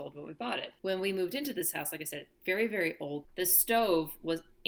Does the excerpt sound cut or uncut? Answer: cut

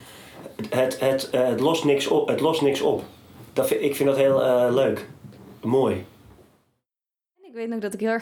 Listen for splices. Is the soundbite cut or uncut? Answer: cut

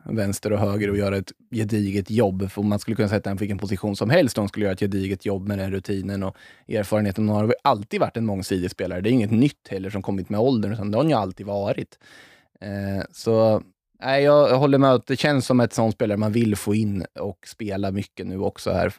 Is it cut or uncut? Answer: uncut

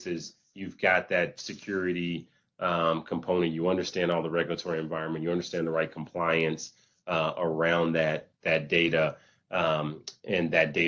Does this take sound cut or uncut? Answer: uncut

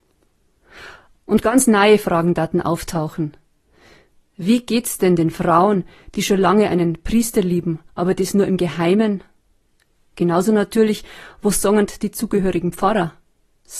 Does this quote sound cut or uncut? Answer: uncut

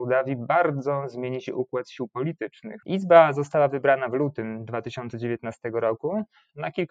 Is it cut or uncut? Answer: cut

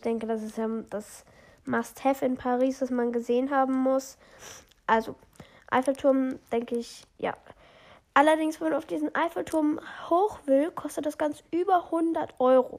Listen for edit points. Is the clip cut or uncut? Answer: uncut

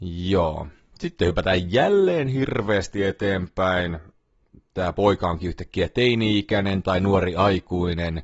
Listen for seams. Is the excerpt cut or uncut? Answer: uncut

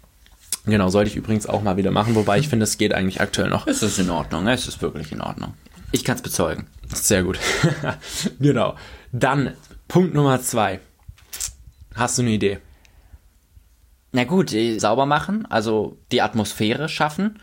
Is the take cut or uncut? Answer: cut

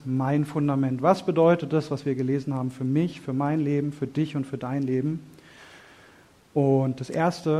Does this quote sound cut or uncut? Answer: uncut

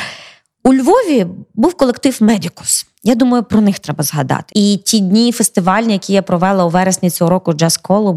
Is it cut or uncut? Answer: cut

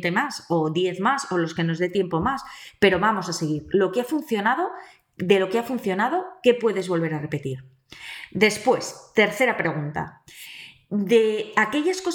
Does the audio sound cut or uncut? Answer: uncut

